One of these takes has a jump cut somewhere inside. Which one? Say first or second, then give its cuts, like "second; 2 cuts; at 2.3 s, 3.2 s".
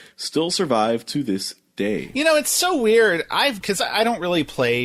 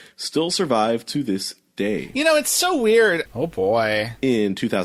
second; 1 cut; at 3.3 s